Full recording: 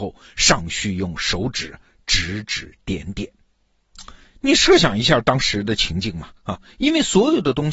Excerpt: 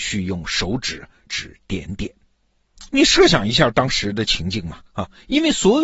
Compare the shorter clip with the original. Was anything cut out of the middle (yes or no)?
yes